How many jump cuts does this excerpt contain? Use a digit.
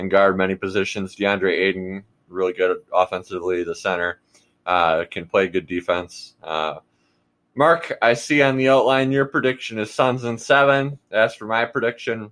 0